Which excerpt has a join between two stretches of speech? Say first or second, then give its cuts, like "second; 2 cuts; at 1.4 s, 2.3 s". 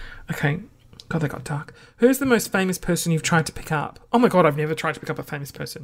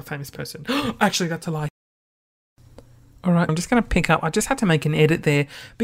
second; 1 cut; at 3.5 s